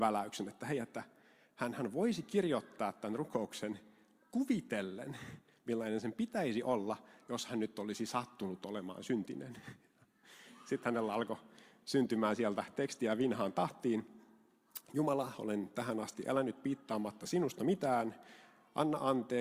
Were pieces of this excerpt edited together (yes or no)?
no